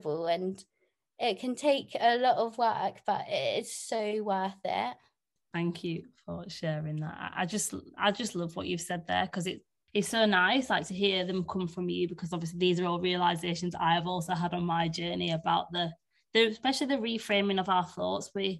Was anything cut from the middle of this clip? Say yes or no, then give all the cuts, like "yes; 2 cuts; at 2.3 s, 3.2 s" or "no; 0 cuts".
no; 0 cuts